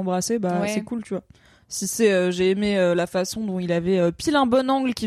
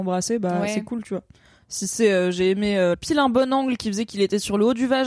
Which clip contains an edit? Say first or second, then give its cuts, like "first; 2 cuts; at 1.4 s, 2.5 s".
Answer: second; 1 cut; at 2.9 s